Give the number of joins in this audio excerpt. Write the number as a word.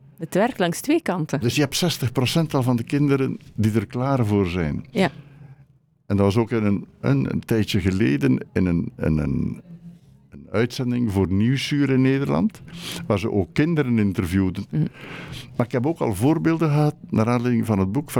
one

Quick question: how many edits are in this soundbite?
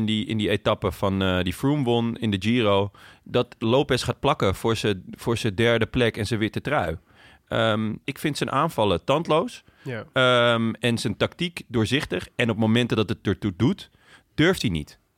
one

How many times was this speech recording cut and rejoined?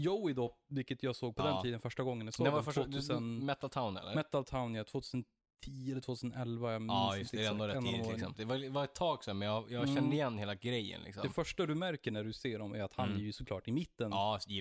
one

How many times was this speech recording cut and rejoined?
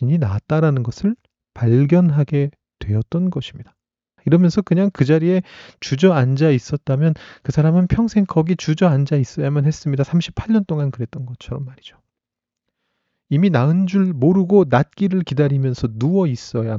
one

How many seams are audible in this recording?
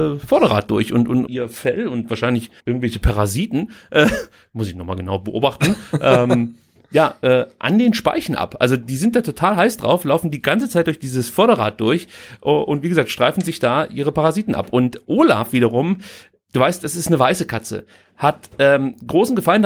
two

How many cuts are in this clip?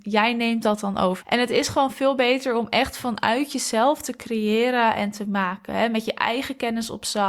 one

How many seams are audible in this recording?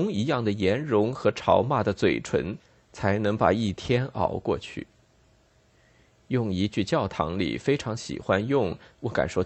zero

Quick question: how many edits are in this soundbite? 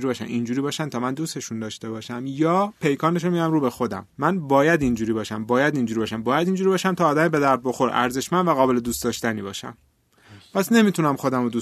one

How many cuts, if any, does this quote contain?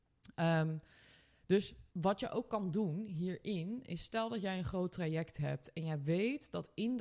one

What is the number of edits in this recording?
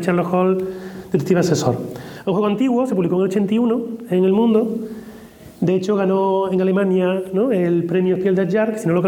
zero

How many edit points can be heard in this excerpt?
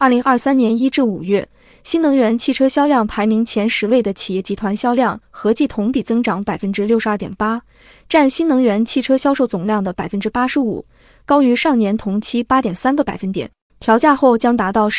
one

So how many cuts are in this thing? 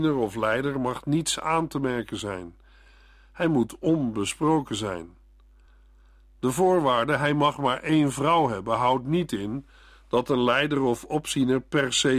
zero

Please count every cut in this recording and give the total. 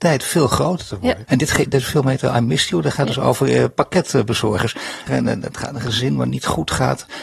two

